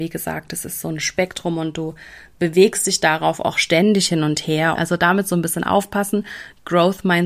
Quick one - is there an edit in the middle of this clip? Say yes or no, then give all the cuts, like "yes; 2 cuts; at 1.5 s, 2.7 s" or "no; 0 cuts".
yes; 1 cut; at 4.7 s